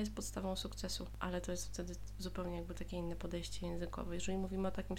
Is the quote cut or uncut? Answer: uncut